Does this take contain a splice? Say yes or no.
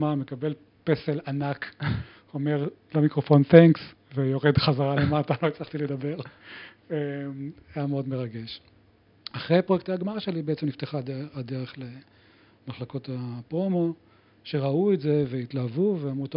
no